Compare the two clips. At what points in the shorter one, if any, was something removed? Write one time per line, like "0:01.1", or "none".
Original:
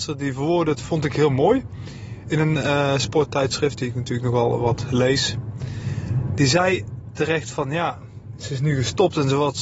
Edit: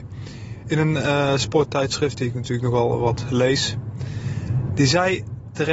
none